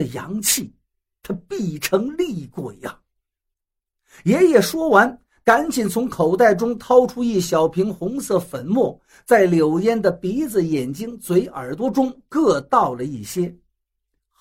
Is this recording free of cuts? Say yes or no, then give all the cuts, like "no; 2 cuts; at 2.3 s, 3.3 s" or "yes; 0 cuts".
yes; 0 cuts